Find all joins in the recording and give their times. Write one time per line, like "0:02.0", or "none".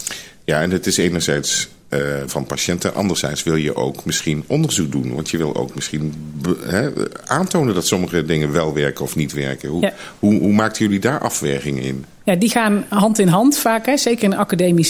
0:02.3